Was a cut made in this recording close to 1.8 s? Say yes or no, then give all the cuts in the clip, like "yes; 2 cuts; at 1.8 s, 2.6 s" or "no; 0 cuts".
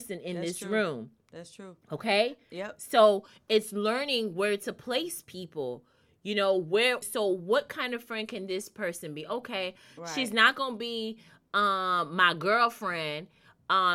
no; 1 cut; at 7.0 s